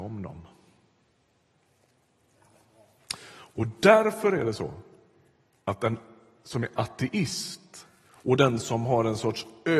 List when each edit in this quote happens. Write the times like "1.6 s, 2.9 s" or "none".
none